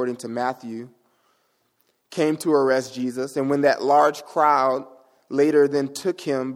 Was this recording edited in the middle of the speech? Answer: no; 0 cuts

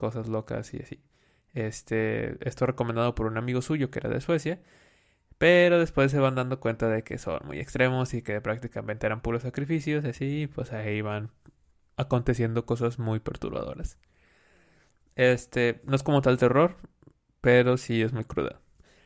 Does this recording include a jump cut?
no; 0 cuts

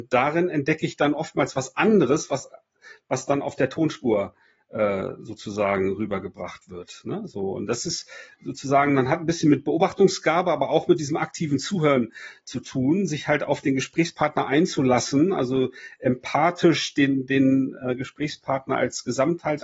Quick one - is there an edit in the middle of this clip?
no; 0 cuts

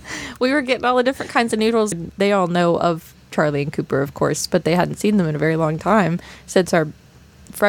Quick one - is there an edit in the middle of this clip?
yes; 1 cut; at 1.9 s

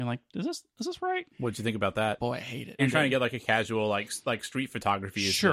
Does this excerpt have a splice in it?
yes; 2 cuts; at 1.3 s, 2.8 s

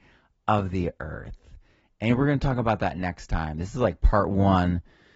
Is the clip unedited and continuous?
yes; 0 cuts

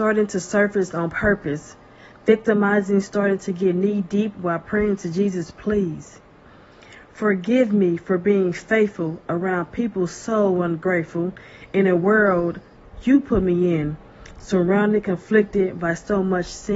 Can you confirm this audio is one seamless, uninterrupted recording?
yes; 0 cuts

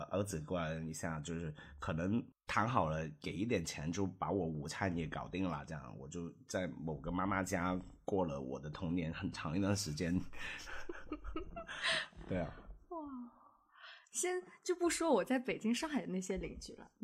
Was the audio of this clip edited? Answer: no; 0 cuts

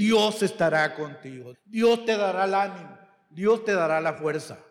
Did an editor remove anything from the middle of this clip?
yes; 1 cut; at 1.5 s

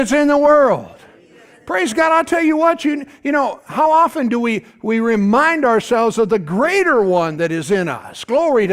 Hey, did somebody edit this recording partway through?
no; 0 cuts

